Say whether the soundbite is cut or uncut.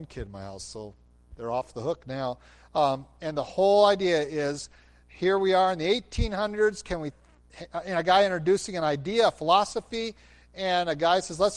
uncut